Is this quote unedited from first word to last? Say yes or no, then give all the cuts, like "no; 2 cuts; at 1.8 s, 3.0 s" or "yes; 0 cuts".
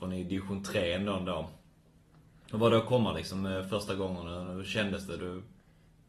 yes; 0 cuts